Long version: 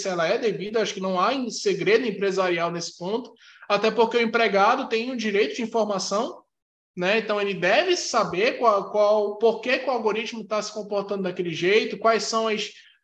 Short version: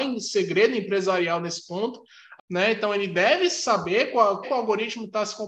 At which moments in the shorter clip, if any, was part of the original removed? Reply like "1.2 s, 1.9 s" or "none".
2.4 s, 4.4 s